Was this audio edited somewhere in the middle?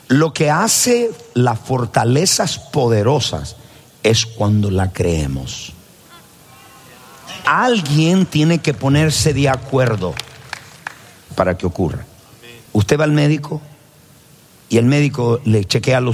yes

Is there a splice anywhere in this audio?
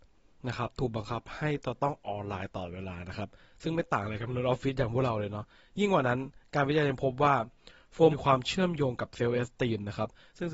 yes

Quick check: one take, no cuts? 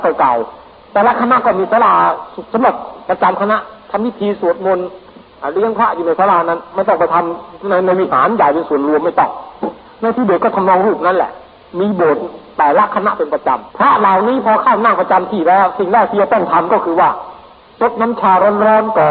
no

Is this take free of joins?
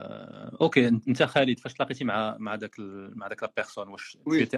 yes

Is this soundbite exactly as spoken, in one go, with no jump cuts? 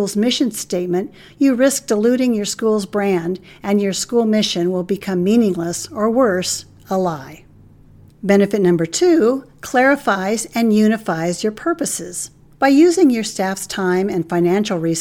no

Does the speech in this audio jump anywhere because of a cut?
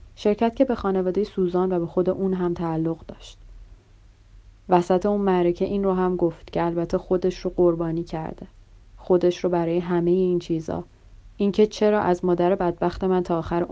no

